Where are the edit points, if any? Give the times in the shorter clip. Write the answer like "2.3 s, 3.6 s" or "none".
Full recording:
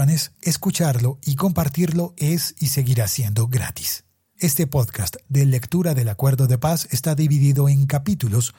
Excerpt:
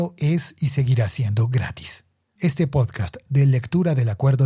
none